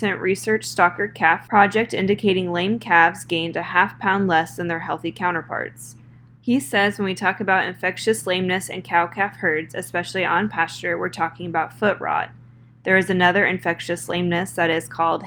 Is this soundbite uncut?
yes; 0 cuts

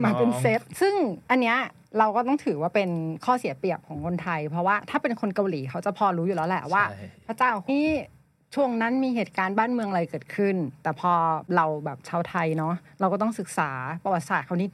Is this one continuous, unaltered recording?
no; 1 cut; at 7.7 s

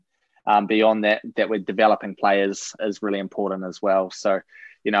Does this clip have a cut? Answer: yes; 1 cut; at 2.8 s

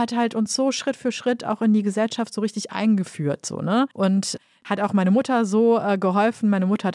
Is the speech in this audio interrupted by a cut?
yes; 1 cut; at 3.9 s

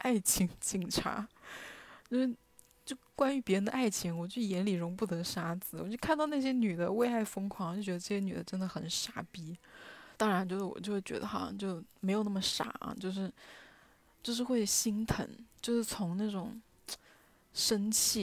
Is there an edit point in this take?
yes; 1 cut; at 10.1 s

